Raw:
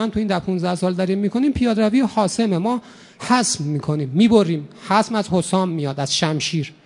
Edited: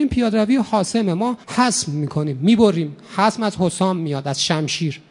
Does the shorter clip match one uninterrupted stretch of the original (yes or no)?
no